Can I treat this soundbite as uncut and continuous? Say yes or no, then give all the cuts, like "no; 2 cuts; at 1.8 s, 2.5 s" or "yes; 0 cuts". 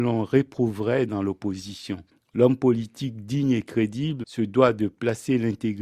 no; 1 cut; at 4.2 s